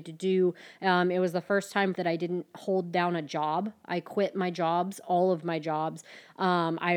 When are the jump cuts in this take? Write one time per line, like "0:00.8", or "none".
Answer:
0:01.9